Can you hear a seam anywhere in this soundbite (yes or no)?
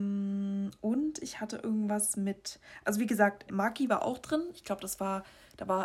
yes